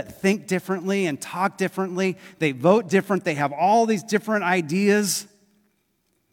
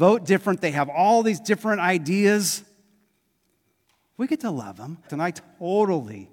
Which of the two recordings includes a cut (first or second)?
second